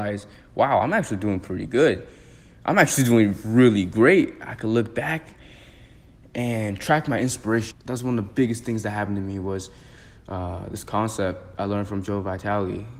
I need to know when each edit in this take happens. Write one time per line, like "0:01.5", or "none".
0:07.7